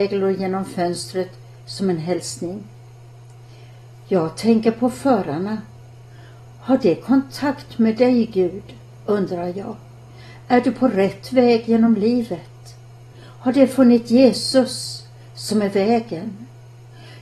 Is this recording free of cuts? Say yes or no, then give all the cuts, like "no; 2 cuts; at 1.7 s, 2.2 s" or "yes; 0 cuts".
yes; 0 cuts